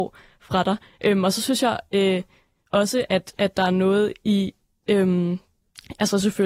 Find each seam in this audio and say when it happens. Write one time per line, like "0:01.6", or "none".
0:03.3